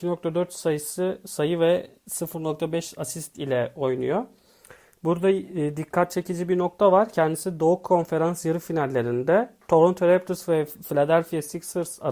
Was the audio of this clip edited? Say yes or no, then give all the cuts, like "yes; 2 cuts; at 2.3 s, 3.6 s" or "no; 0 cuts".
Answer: no; 0 cuts